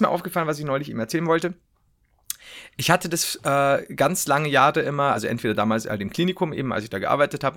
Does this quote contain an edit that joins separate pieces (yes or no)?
no